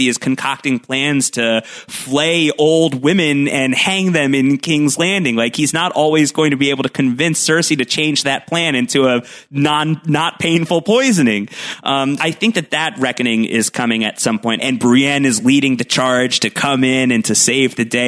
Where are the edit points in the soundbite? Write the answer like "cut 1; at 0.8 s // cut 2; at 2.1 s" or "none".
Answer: cut 1; at 12.2 s // cut 2; at 14.6 s